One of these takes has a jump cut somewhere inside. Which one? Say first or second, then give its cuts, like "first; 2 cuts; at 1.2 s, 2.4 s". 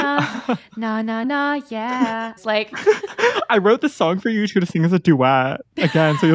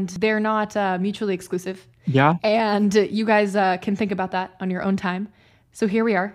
first; 2 cuts; at 1.2 s, 2.4 s